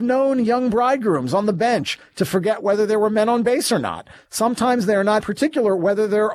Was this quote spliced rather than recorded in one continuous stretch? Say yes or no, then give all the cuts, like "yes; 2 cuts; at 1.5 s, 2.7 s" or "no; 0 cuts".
yes; 1 cut; at 5.2 s